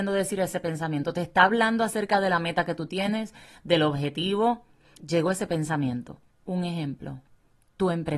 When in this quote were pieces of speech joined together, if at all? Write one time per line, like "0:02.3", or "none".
0:05.0
0:06.3